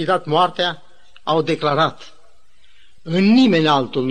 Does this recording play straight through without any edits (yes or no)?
yes